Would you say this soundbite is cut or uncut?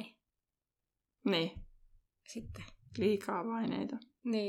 uncut